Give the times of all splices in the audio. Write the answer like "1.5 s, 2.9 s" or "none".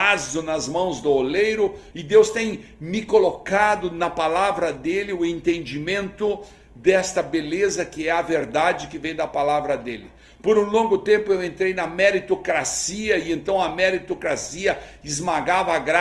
1.9 s